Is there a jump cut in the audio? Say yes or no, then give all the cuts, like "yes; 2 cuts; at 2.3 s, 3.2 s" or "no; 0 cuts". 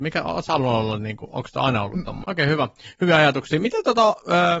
yes; 1 cut; at 2.2 s